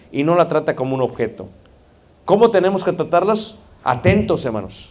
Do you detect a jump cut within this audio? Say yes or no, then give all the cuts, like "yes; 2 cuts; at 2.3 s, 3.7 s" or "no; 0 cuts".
no; 0 cuts